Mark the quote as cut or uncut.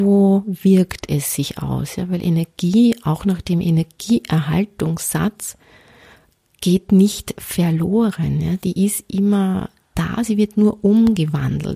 uncut